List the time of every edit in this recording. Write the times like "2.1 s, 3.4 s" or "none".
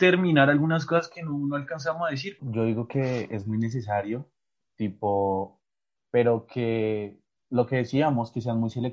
2.4 s, 6.0 s